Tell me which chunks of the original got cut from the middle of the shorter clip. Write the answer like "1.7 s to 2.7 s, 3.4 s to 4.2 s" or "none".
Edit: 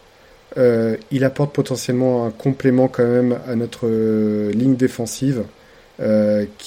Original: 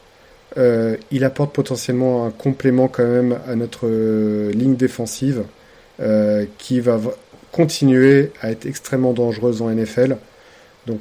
none